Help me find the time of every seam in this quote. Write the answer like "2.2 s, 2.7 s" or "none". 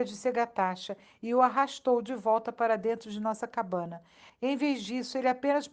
4.3 s